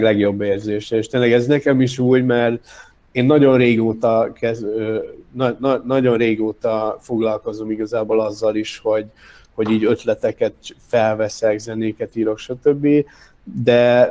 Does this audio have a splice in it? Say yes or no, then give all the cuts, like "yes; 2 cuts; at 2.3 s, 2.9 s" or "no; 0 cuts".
no; 0 cuts